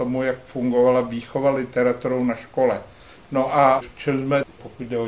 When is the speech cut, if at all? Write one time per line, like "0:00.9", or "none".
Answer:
0:03.2